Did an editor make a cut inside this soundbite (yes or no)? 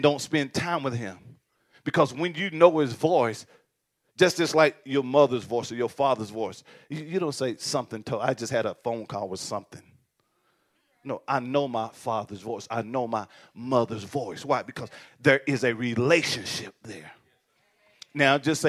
no